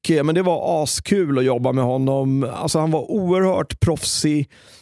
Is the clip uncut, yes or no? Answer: yes